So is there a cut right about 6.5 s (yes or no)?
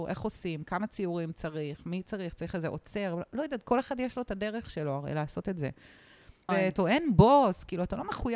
yes